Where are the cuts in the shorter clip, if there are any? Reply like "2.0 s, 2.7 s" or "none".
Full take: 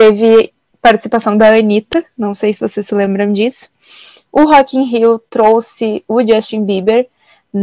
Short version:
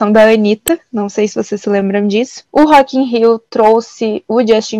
2.5 s